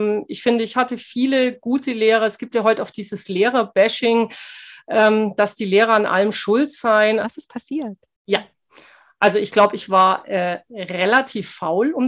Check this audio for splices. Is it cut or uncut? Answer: cut